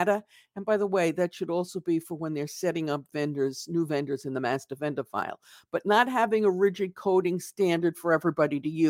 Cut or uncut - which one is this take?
uncut